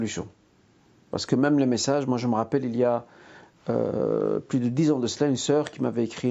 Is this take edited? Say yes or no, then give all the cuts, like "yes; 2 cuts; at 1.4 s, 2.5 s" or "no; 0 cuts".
no; 0 cuts